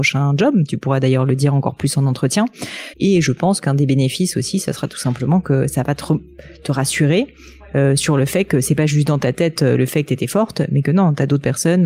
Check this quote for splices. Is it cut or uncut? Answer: cut